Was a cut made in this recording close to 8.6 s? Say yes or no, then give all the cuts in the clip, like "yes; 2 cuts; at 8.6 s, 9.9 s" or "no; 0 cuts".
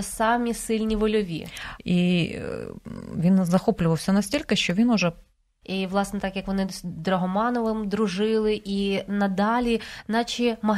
no; 2 cuts; at 1.8 s, 5.6 s